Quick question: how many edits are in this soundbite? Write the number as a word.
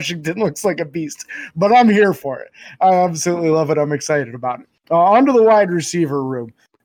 zero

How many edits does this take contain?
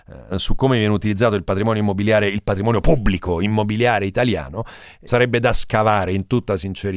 one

